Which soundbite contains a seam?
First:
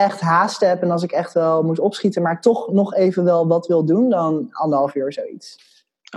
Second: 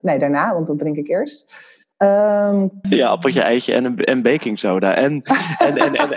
second; 1 cut; at 2.8 s

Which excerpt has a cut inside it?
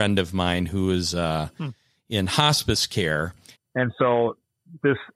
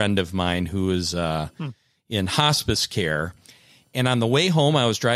first; 1 cut; at 3.5 s

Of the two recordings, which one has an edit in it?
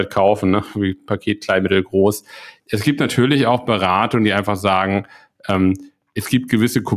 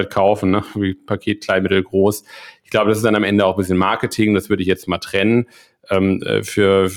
first; 1 cut; at 2.6 s

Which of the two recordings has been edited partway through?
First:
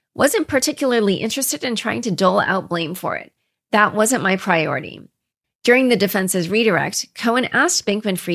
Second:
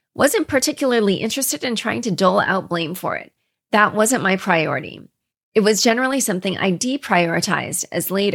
first; 1 cut; at 5.4 s

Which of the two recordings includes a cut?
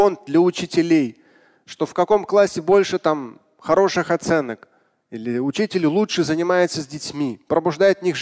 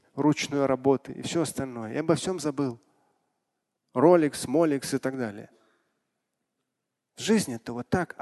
second; 1 cut; at 3.7 s

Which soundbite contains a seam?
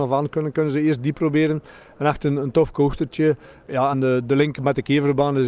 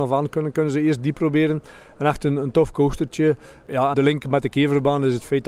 second; 1 cut; at 3.9 s

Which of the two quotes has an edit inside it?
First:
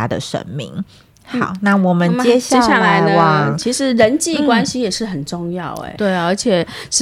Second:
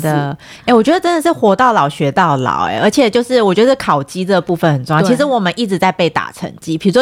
first; 1 cut; at 6.0 s

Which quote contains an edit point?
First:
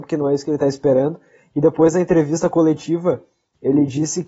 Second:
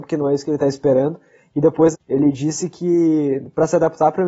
second; 1 cut; at 1.9 s

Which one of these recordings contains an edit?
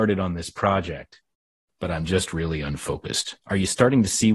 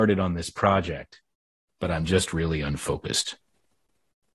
first; 1 cut; at 3.4 s

